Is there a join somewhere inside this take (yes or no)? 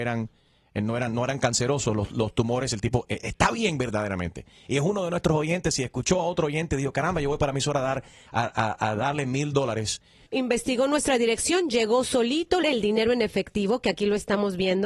yes